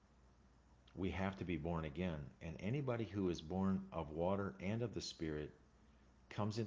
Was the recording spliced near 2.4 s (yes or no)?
no